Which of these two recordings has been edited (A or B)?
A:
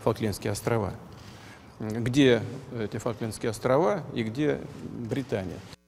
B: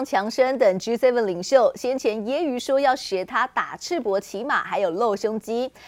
A